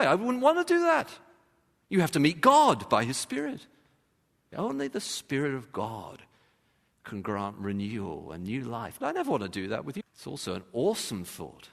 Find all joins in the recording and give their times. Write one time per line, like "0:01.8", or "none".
0:04.5
0:09.0
0:10.0